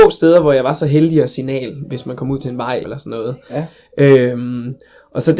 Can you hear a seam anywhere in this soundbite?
yes; 1 cut; at 2.8 s

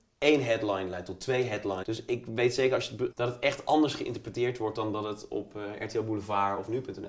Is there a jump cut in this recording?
yes; 2 cuts; at 1.8 s, 3.1 s

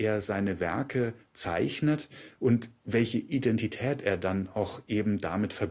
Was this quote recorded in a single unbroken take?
yes; 0 cuts

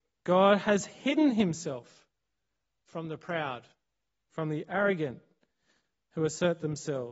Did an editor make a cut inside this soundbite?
no; 0 cuts

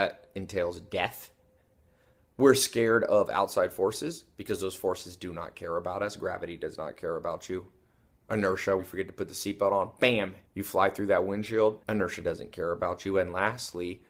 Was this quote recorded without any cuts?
no; 3 cuts; at 8.8 s, 10.4 s, 11.8 s

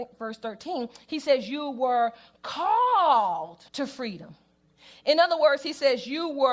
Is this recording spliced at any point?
yes; 1 cut; at 3.7 s

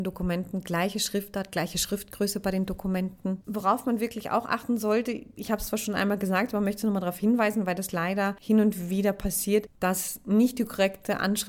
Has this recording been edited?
yes; 1 cut; at 3.4 s

